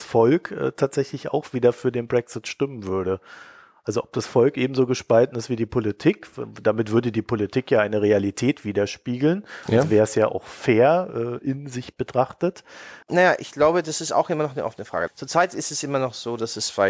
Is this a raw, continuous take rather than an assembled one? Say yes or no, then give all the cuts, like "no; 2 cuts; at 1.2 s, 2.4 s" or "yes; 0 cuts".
no; 2 cuts; at 13.0 s, 15.1 s